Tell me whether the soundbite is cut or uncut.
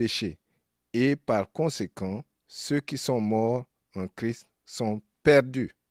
cut